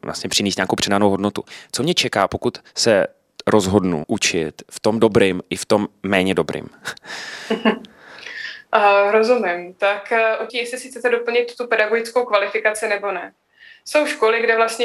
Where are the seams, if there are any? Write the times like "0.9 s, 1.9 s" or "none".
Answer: 4.0 s, 10.5 s